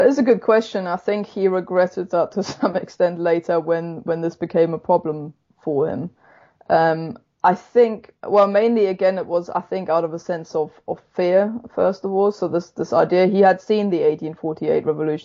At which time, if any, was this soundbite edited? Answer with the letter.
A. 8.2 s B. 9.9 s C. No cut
A